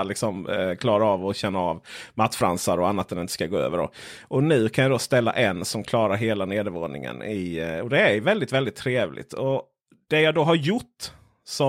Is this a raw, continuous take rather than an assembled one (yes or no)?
yes